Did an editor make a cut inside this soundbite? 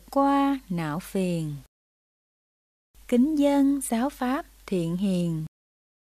no; 0 cuts

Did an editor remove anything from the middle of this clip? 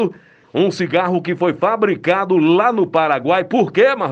no; 0 cuts

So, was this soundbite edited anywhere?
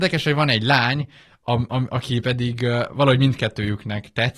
no; 0 cuts

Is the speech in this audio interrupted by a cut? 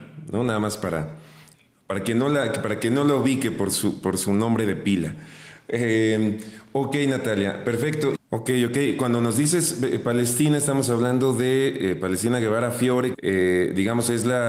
yes; 2 cuts; at 8.1 s, 13.1 s

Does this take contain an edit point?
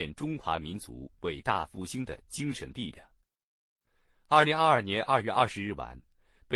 no; 0 cuts

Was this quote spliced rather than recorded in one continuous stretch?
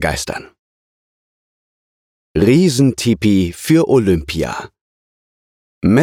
no; 0 cuts

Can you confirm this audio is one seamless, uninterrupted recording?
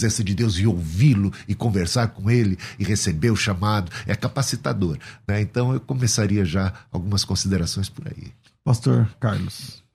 yes; 0 cuts

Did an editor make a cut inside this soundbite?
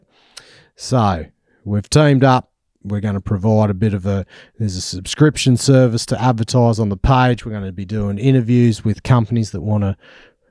no; 0 cuts

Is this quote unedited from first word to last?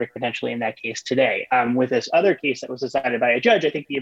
yes; 0 cuts

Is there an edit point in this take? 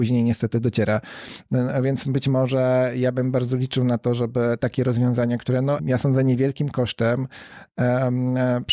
yes; 1 cut; at 5.8 s

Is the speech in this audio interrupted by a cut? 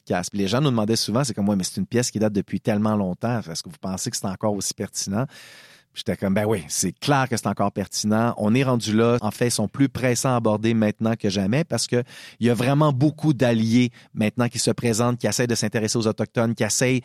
yes; 1 cut; at 9.2 s

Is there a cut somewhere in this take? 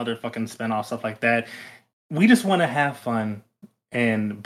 no; 0 cuts

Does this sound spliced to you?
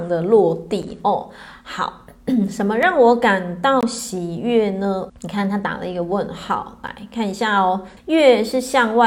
yes; 2 cuts; at 5.1 s, 8.0 s

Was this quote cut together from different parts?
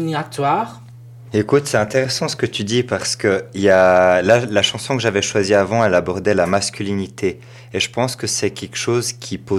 yes; 1 cut; at 1.3 s

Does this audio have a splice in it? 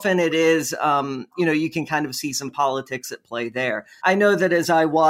yes; 1 cut; at 4.0 s

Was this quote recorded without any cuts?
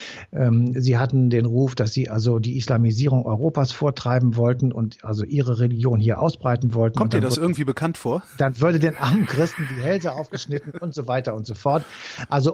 yes; 0 cuts

